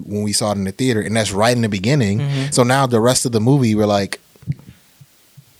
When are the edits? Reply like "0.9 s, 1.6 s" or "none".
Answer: none